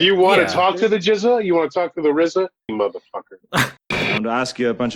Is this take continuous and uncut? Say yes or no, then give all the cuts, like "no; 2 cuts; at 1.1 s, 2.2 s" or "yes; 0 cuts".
no; 2 cuts; at 2.7 s, 3.8 s